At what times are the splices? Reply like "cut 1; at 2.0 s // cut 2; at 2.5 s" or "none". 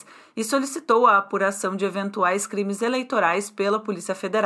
none